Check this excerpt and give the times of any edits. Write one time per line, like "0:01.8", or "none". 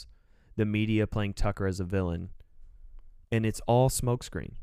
0:03.2